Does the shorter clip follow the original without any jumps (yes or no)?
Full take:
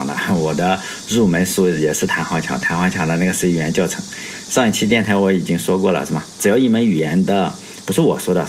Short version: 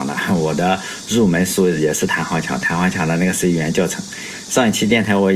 yes